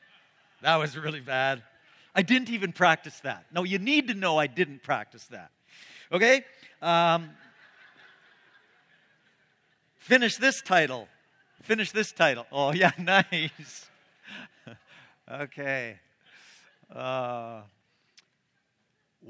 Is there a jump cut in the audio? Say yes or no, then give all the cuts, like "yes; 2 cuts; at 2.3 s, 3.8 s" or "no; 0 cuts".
no; 0 cuts